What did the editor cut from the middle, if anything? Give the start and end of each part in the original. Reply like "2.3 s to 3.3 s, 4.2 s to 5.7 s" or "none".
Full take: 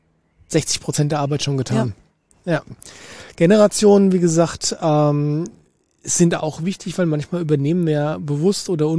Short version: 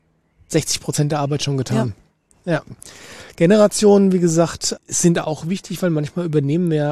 4.8 s to 5.9 s